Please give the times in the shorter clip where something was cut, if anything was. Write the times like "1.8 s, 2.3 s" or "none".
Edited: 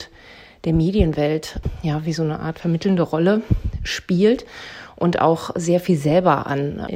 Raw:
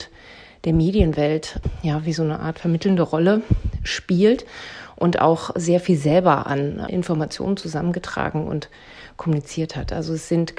none